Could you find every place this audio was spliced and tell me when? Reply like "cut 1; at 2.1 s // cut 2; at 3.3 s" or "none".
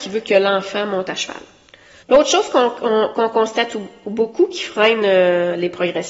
cut 1; at 2.0 s